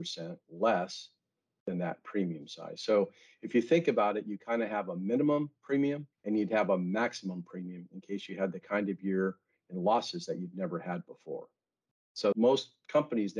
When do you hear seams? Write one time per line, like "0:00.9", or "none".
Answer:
0:06.1